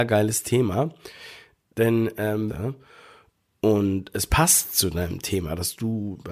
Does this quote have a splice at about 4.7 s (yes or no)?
no